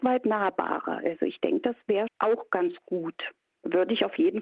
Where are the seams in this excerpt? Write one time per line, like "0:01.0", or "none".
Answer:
0:02.1